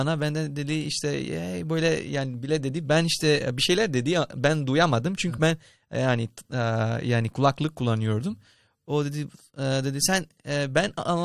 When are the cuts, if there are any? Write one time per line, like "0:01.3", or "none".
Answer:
none